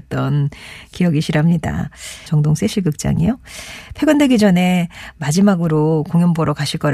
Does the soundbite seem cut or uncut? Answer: cut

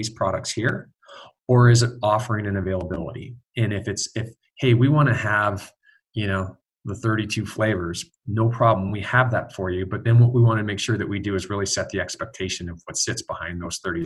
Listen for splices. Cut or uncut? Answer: uncut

